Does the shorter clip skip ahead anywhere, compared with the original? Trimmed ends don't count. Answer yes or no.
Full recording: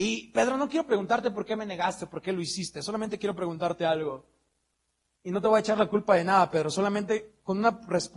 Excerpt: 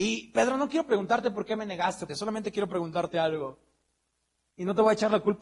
yes